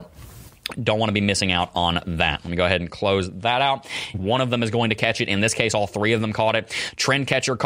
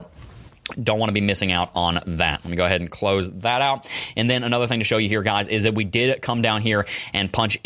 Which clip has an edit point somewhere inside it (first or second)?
first